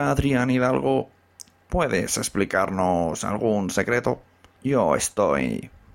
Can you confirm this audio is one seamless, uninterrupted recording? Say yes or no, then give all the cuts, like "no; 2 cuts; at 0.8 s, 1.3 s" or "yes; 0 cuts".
no; 1 cut; at 4.6 s